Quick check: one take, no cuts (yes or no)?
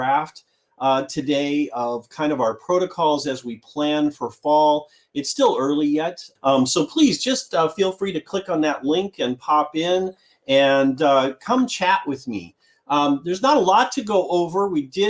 no